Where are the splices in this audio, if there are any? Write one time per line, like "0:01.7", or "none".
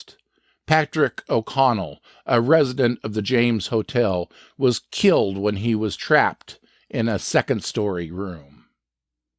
none